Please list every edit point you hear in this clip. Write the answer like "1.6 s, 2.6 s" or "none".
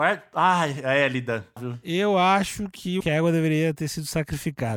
1.6 s, 3.0 s